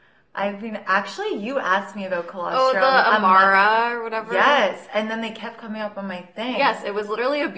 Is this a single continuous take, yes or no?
yes